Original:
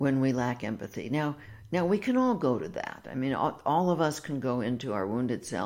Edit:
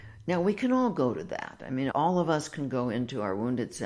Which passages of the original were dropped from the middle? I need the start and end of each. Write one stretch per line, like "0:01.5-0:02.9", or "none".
0:03.4-0:03.6